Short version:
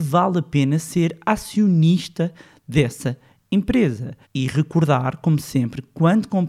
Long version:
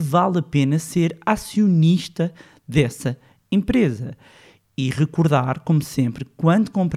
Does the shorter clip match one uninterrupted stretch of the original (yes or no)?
no